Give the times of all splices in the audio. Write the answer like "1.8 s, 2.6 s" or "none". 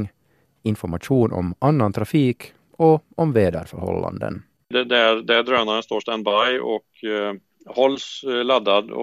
4.6 s